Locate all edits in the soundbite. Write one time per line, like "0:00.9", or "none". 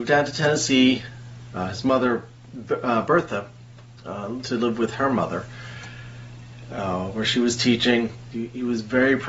0:08.3